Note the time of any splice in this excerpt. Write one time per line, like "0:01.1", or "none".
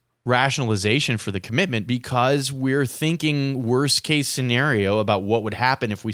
0:01.9